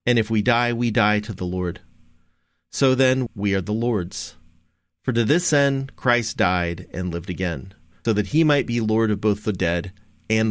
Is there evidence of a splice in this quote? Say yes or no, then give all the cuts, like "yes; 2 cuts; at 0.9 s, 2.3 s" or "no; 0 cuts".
yes; 2 cuts; at 3.3 s, 8.1 s